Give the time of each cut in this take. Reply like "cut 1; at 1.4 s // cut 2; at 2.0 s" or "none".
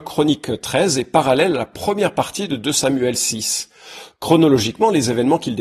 none

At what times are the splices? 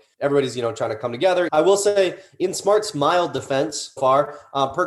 cut 1; at 1.5 s // cut 2; at 4.0 s

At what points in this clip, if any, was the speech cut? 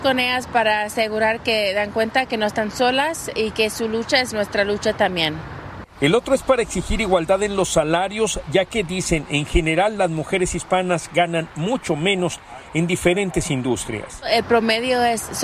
none

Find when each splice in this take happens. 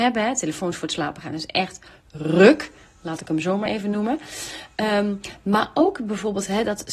none

